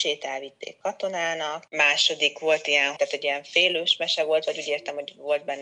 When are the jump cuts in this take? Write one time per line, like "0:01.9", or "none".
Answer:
0:01.7
0:03.0